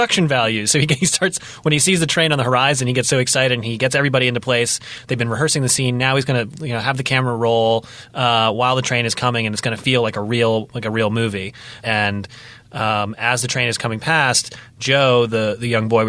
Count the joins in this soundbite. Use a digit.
1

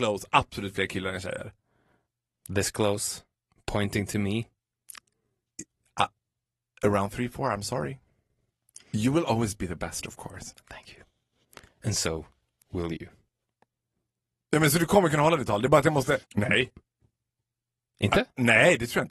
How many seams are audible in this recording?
1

